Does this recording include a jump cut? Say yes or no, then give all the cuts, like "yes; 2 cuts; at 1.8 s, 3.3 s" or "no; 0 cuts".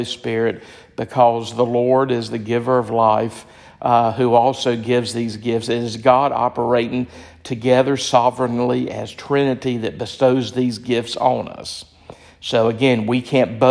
no; 0 cuts